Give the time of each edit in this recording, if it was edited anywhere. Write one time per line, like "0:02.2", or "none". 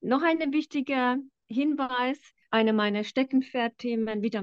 none